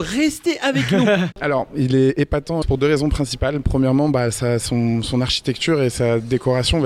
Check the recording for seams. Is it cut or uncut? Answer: cut